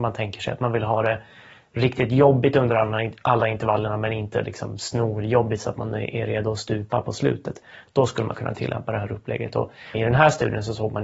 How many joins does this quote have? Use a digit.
1